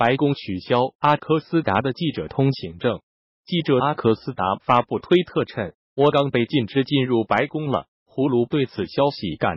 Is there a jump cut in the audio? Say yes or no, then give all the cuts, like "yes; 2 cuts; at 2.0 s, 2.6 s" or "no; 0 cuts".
yes; 2 cuts; at 6.1 s, 7.9 s